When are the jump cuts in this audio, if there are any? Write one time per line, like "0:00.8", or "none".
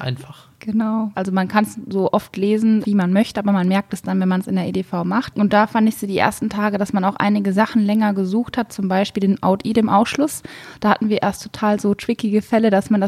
0:01.1
0:02.8